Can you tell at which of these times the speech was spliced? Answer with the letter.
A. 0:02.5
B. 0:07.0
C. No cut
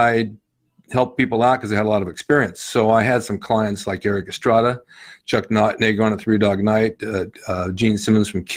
C